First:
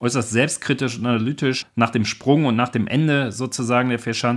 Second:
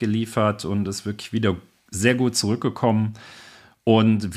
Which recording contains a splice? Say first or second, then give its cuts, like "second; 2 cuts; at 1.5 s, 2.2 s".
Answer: first; 1 cut; at 1.6 s